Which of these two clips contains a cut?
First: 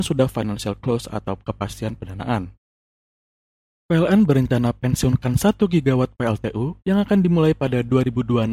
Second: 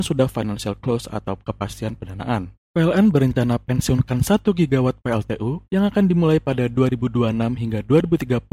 second; 1 cut; at 2.6 s

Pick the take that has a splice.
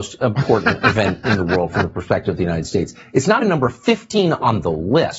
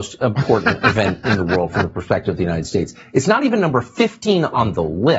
first; 1 cut; at 3.4 s

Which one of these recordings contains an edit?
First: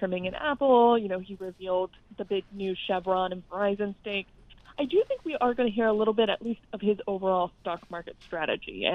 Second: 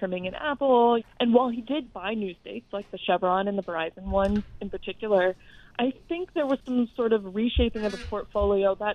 second; 1 cut; at 1.0 s

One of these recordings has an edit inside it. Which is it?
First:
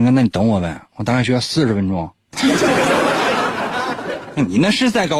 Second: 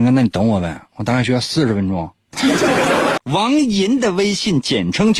second; 1 cut; at 3.2 s

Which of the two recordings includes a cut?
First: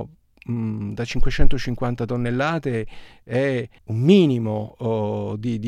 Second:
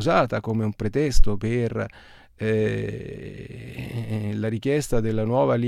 first; 1 cut; at 3.8 s

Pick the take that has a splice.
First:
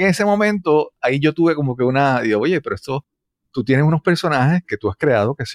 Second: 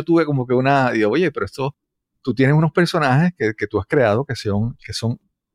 first; 1 cut; at 4.6 s

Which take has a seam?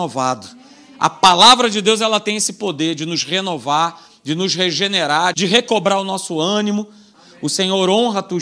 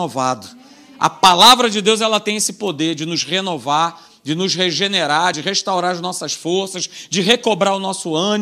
first; 2 cuts; at 5.3 s, 7.1 s

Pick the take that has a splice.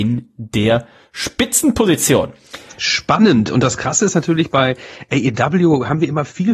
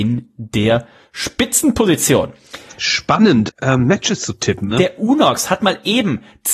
second; 2 cuts; at 3.5 s, 4.7 s

